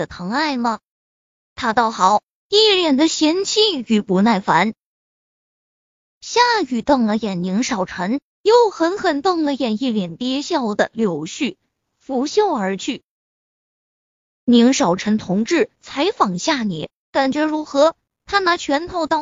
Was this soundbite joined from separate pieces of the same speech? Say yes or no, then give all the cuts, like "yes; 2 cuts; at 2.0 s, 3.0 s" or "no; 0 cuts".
no; 0 cuts